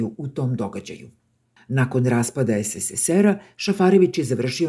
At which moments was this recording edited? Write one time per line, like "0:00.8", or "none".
0:01.6